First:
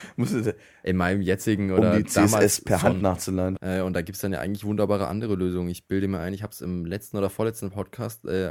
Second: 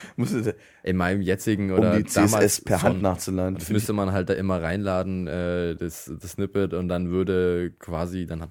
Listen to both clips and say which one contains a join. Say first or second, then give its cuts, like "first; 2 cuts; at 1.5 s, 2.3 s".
first; 1 cut; at 3.6 s